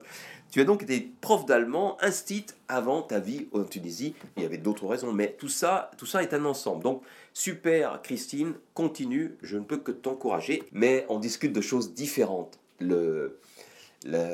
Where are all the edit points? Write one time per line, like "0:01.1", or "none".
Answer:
0:04.4
0:10.7